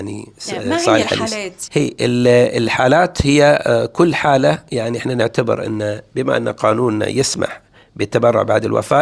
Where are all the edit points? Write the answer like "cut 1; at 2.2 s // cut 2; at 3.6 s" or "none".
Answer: cut 1; at 1.7 s